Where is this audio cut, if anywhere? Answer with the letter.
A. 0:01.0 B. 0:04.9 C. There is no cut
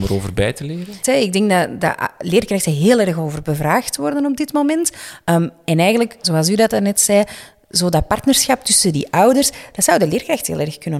A